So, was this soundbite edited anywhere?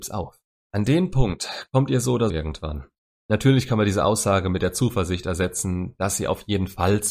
yes; 1 cut; at 2.3 s

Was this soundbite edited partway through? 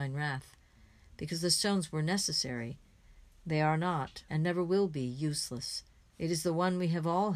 yes; 2 cuts; at 4.3 s, 6.0 s

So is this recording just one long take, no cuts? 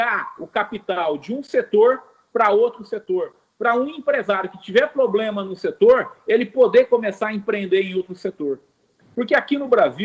yes; 0 cuts

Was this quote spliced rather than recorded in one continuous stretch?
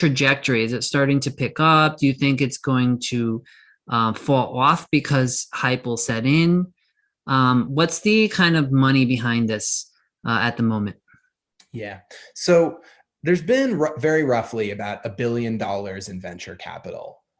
no; 0 cuts

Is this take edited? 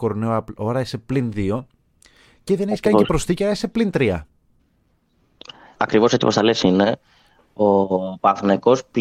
yes; 1 cut; at 5.8 s

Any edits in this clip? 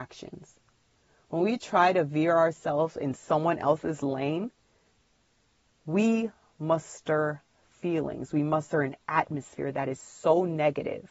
no; 0 cuts

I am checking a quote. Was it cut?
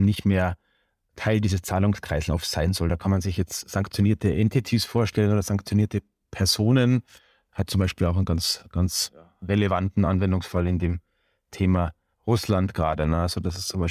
no; 0 cuts

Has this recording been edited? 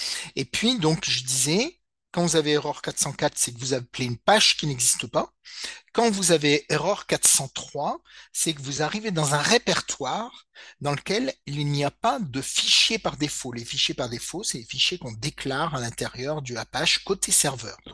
no; 0 cuts

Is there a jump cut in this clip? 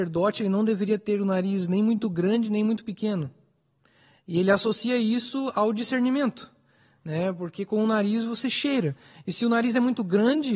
no; 0 cuts

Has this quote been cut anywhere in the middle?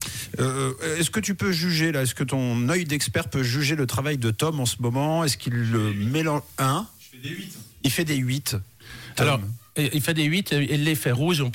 no; 0 cuts

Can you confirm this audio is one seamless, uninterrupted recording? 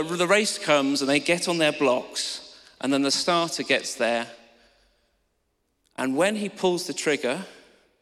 yes; 0 cuts

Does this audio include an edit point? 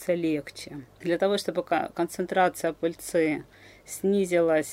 yes; 1 cut; at 1.0 s

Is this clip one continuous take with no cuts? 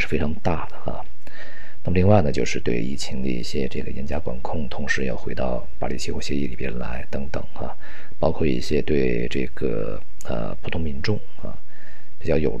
yes; 0 cuts

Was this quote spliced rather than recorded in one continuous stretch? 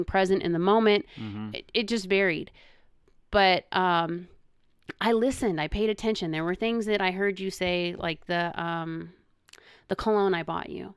no; 0 cuts

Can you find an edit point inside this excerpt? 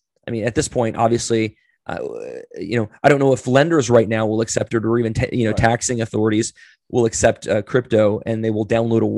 no; 0 cuts

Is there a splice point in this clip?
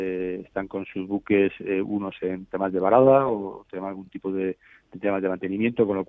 no; 0 cuts

